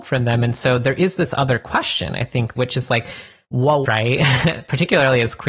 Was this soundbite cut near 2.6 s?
yes; 2 cuts; at 2.6 s, 3.8 s

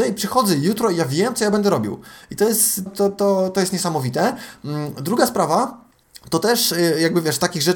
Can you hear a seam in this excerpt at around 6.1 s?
no; 1 cut; at 2.9 s

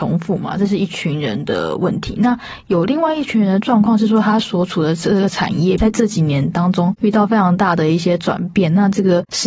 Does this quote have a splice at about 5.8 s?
yes; 1 cut; at 5.8 s

